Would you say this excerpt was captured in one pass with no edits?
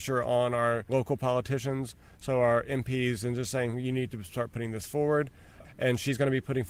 no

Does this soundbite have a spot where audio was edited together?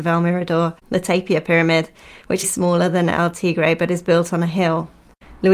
yes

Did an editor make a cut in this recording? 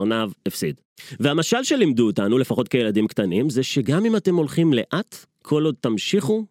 no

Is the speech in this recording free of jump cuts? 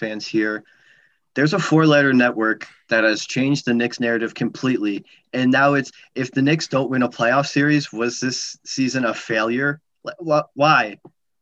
yes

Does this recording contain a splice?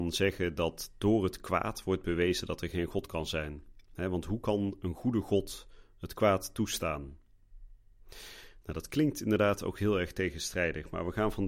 no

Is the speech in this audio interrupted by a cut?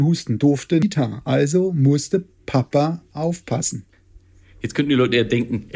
no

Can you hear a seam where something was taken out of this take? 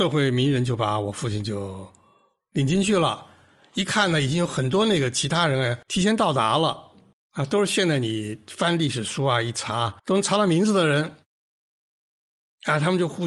yes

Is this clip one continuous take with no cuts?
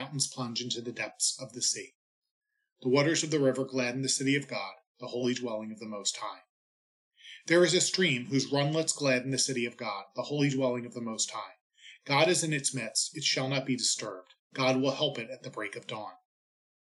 yes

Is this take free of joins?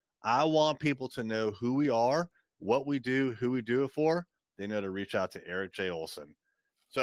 no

